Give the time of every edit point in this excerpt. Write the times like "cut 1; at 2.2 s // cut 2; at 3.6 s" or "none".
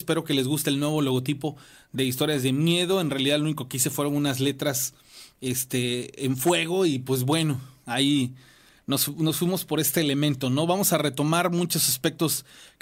none